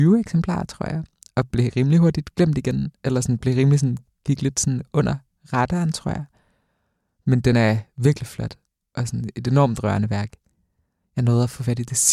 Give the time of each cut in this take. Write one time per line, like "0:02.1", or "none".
none

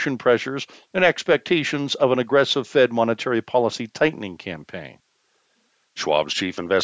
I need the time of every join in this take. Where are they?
none

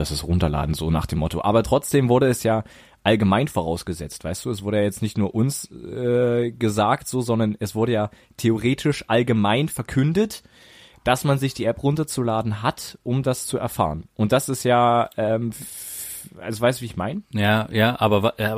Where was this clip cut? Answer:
none

